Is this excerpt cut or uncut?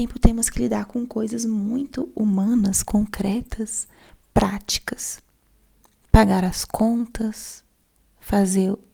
uncut